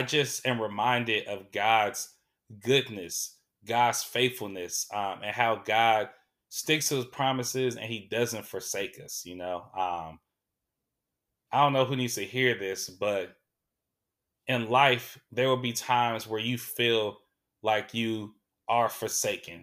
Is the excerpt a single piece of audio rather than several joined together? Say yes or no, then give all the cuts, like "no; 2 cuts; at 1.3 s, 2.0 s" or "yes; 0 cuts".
yes; 0 cuts